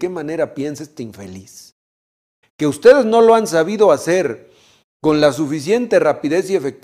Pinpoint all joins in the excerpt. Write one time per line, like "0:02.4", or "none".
0:02.4